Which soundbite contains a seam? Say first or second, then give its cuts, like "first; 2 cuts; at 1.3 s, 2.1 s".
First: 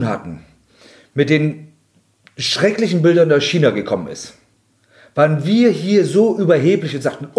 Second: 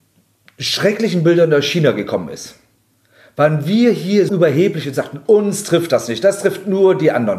second; 1 cut; at 4.3 s